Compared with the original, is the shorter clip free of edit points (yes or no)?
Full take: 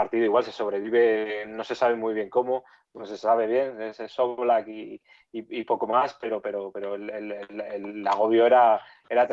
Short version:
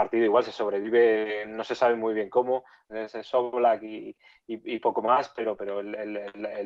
no